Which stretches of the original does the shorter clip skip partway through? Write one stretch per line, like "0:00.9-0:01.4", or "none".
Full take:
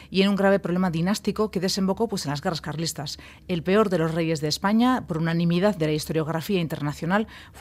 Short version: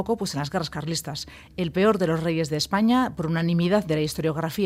none